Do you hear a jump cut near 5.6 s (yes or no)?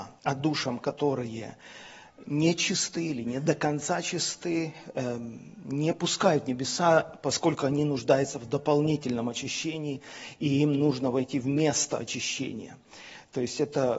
no